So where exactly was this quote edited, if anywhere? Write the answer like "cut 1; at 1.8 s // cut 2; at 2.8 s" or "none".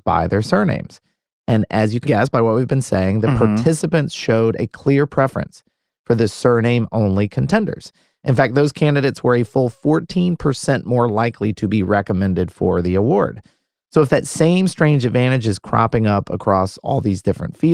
cut 1; at 2.0 s

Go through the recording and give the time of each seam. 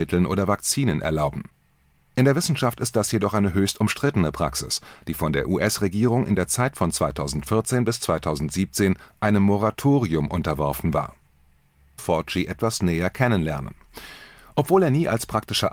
cut 1; at 12.0 s

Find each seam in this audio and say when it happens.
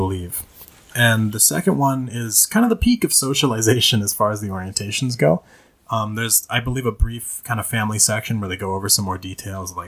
none

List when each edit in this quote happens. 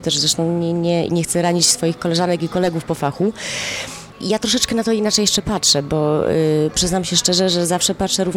cut 1; at 1.1 s

